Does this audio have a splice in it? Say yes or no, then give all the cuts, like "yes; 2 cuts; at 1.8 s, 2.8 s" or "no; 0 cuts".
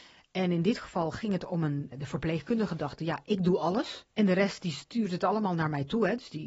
yes; 2 cuts; at 1.9 s, 4.1 s